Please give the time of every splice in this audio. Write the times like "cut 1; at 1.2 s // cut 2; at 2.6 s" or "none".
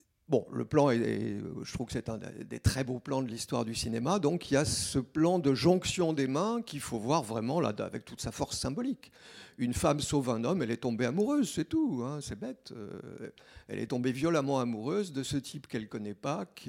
none